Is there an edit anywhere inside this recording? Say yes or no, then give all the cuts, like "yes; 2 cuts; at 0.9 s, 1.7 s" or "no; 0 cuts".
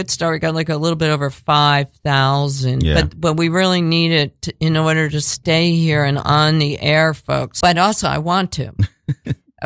yes; 1 cut; at 7.6 s